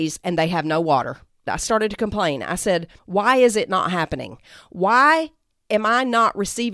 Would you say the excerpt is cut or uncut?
cut